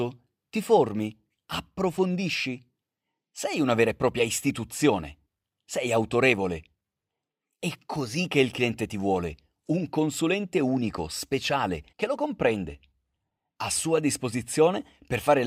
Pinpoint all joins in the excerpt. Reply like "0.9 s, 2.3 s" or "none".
11.9 s